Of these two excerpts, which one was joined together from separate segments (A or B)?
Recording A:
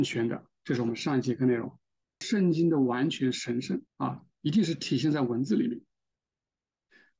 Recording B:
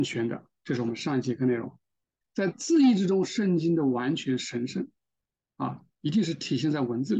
A